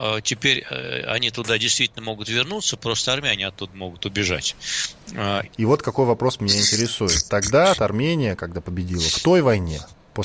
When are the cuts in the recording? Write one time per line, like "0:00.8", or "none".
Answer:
0:05.4
0:07.7